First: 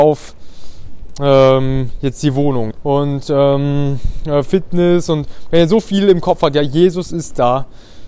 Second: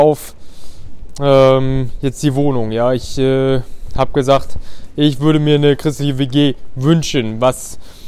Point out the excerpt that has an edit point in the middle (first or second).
first